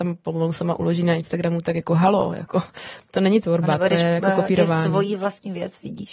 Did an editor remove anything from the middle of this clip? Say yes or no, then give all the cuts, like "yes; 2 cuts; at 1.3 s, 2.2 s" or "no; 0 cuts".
no; 0 cuts